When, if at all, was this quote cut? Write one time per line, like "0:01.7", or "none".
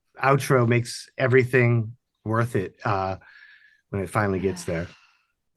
none

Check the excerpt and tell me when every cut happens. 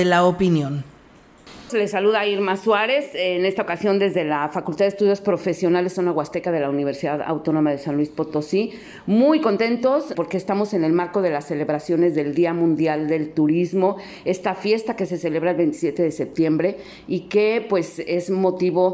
0:01.7
0:10.1

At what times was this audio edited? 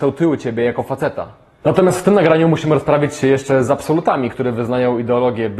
0:01.6
0:04.3

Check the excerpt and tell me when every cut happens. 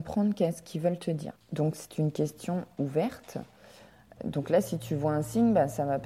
0:01.4

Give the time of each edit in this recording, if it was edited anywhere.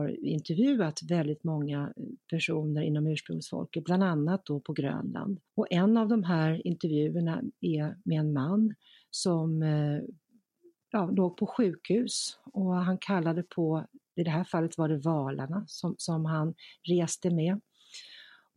0:05.5

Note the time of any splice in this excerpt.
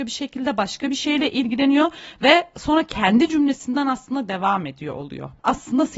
none

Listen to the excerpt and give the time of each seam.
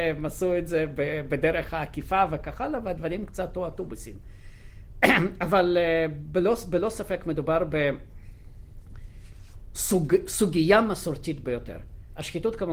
none

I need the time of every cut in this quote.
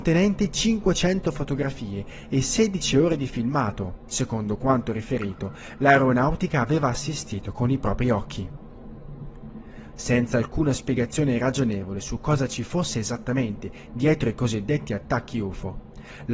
0:04.1
0:09.9

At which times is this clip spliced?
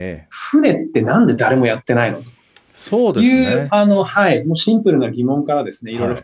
none

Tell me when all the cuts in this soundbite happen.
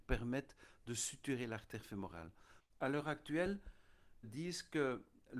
0:02.6
0:04.2

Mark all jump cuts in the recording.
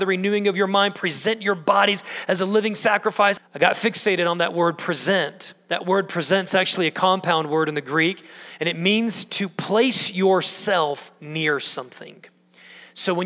0:03.4

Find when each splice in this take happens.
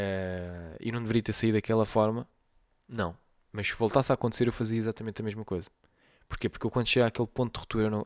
none

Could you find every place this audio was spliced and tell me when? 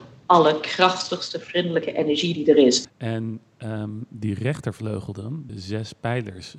0:02.8
0:05.5

